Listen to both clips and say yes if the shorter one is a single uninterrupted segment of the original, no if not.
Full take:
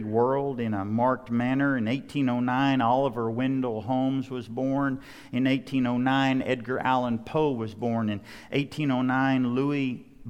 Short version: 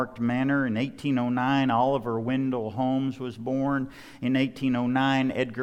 yes